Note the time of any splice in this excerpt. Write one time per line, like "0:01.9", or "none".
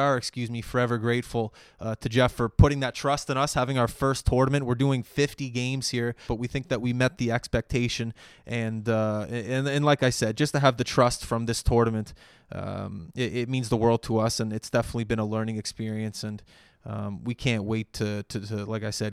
0:06.3